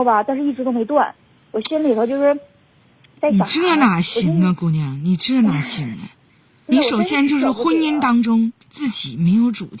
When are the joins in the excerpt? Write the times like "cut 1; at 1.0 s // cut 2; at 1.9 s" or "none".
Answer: cut 1; at 6.7 s // cut 2; at 8.6 s